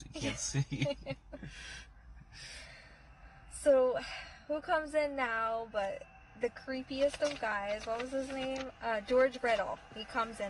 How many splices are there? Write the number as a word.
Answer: zero